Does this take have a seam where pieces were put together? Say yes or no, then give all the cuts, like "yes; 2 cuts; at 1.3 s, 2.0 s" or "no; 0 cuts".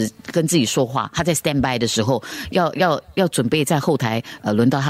no; 0 cuts